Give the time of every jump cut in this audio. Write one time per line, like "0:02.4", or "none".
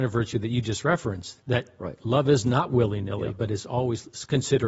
none